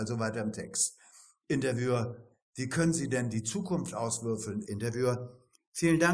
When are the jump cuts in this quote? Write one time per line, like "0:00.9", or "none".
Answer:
0:04.6